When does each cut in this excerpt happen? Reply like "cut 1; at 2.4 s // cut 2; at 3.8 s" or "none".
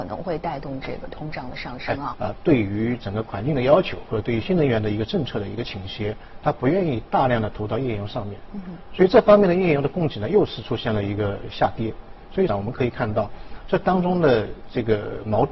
cut 1; at 2.1 s // cut 2; at 4.4 s // cut 3; at 12.5 s